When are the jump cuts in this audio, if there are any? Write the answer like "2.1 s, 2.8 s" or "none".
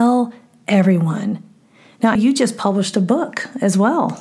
2.2 s

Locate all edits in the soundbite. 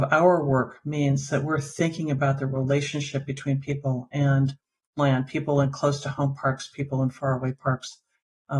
none

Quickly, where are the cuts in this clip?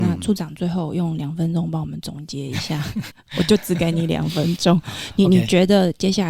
3.1 s

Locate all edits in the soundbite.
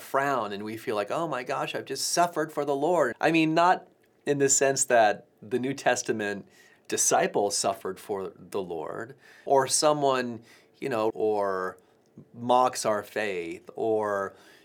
3.1 s, 9.5 s, 11.1 s

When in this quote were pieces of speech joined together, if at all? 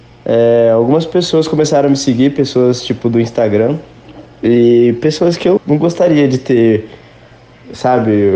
5.6 s

